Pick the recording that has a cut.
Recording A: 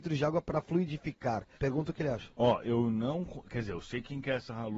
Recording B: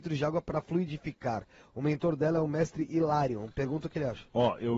A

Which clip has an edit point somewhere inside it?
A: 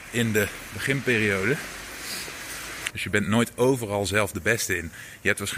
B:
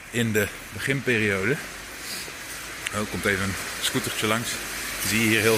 A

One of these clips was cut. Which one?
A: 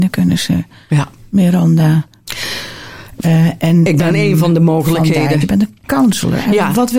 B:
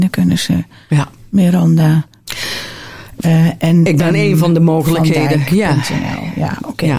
A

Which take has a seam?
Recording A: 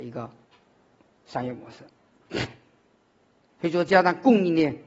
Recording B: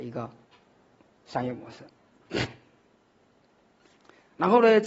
A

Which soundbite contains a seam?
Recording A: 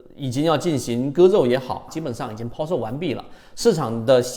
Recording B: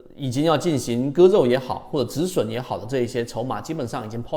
A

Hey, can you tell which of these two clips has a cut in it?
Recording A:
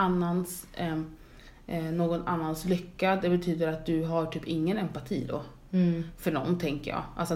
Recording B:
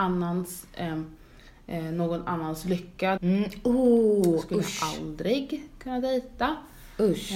B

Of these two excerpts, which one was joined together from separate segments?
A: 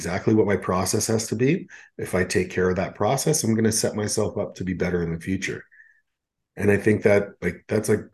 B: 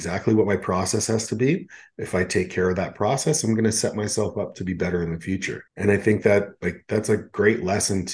B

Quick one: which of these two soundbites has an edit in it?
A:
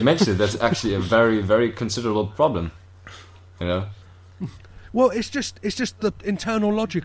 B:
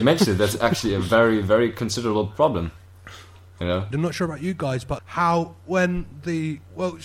B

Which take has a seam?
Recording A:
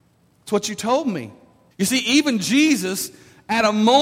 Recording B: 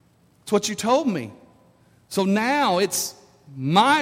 A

